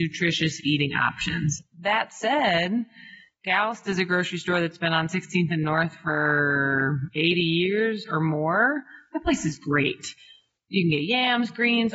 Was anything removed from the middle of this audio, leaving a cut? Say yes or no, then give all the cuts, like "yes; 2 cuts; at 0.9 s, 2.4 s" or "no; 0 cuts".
no; 0 cuts